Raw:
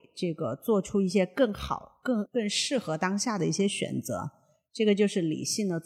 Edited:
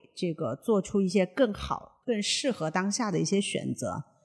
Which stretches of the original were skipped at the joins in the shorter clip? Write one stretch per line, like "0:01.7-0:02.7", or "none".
0:02.0-0:02.3